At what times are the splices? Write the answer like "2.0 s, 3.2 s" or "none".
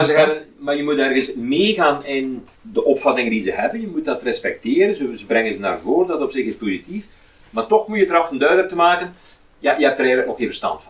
2.5 s